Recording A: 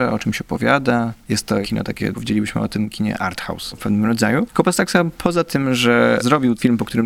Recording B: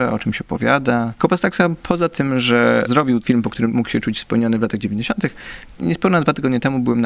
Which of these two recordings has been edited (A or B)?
B